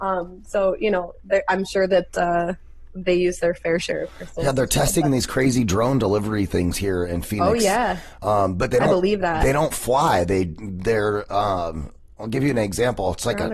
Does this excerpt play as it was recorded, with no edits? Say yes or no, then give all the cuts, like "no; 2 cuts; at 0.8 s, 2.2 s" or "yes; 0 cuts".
yes; 0 cuts